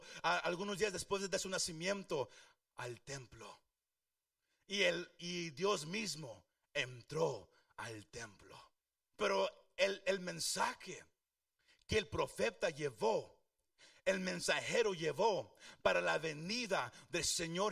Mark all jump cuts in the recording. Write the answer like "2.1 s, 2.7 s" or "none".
9.1 s

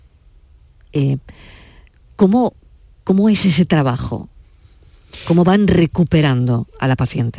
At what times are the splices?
none

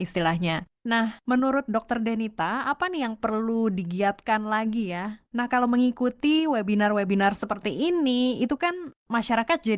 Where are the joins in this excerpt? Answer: 5.2 s

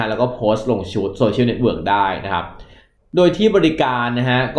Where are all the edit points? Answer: none

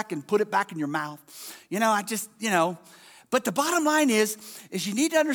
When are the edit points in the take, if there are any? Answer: none

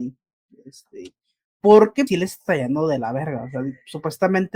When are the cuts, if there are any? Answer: 2.1 s

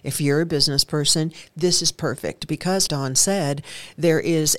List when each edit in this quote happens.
2.9 s

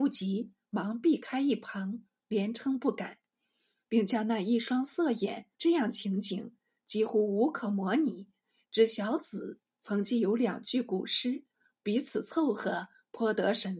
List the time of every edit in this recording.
5.5 s

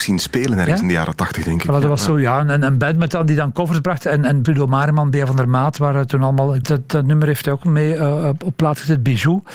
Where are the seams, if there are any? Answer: 4.5 s, 6.6 s

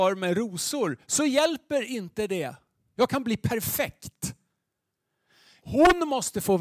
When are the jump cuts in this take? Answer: 3.0 s, 5.6 s

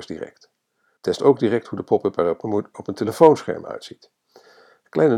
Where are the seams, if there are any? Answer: 1.0 s

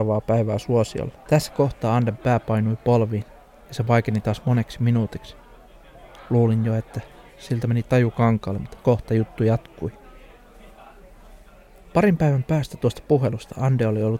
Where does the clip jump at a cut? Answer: 1.3 s

